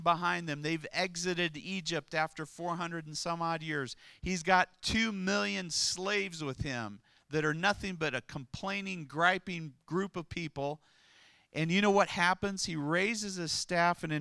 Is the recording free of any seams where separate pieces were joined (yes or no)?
yes